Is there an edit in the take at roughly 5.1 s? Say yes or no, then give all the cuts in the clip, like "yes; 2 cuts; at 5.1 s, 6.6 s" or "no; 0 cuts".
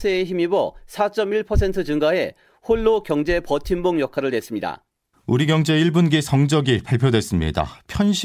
yes; 1 cut; at 5.1 s